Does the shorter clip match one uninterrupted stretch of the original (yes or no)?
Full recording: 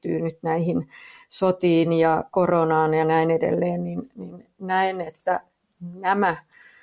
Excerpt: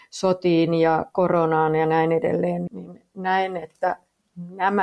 no